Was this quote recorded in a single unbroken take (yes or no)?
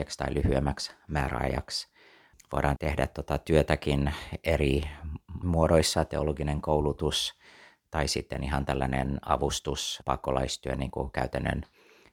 yes